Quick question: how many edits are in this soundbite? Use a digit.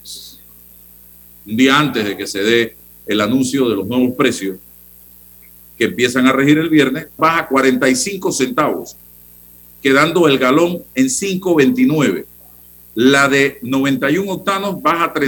1